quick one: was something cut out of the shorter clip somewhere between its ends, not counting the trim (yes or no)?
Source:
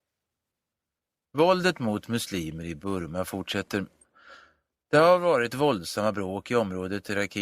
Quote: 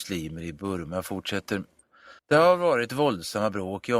yes